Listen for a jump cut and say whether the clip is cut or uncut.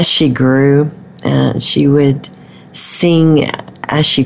uncut